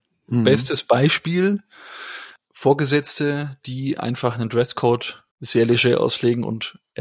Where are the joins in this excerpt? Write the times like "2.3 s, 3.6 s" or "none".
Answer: 2.4 s, 5.3 s

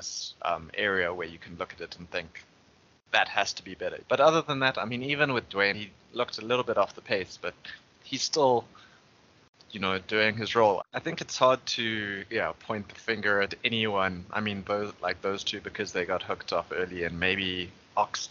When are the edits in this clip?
4.0 s, 5.7 s, 10.8 s

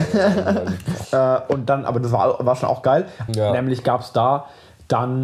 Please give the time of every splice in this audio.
1.0 s, 3.3 s

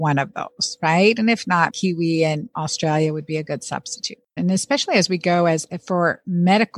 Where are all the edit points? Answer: 1.7 s, 4.4 s

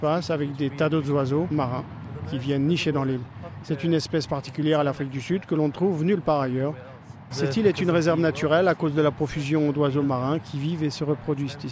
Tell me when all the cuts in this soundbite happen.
3.6 s, 7.3 s

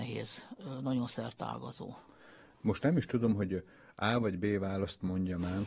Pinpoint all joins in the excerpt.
none

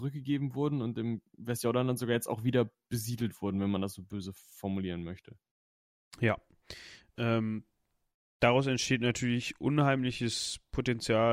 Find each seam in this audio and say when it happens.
none

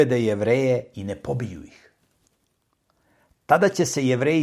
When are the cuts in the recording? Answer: none

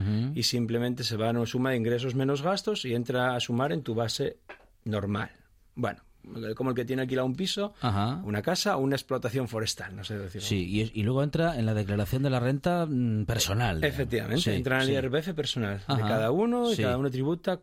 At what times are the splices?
none

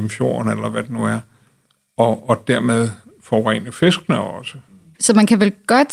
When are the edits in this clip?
4.9 s

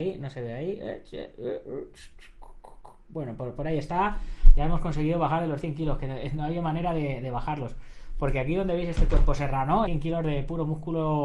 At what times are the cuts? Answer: 9.9 s

